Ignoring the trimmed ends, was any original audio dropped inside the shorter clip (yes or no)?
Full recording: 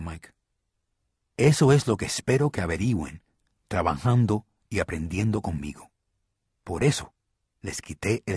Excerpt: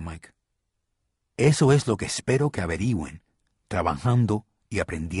no